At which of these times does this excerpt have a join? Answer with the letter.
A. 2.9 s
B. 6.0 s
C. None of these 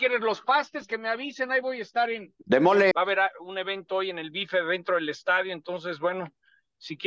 A